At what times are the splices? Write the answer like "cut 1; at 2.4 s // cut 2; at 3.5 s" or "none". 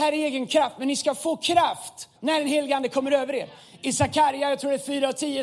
cut 1; at 2.2 s

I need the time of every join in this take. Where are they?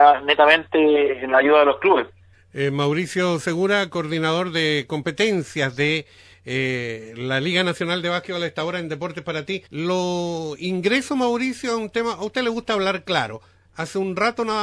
cut 1; at 2.3 s // cut 2; at 9.7 s

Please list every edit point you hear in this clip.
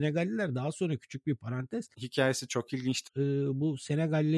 cut 1; at 1.9 s // cut 2; at 3.1 s

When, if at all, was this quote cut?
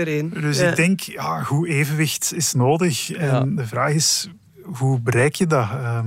none

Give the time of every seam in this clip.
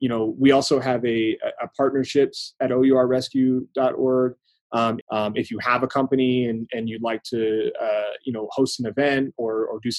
cut 1; at 5.0 s

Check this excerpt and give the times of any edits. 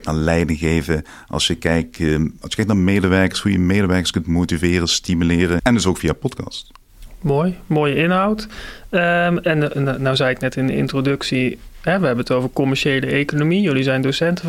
cut 1; at 5.6 s

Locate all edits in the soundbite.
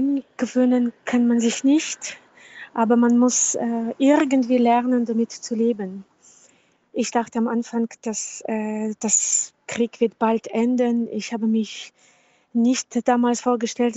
none

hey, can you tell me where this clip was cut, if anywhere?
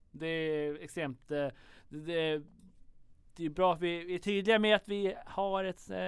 none

